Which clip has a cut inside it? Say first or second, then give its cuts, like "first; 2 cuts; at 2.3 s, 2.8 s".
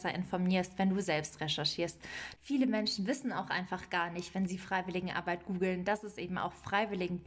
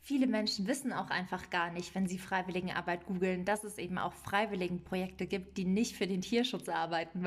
first; 1 cut; at 2.4 s